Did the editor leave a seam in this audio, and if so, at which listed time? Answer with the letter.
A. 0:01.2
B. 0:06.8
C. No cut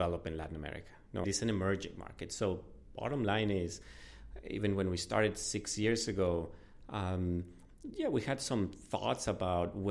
A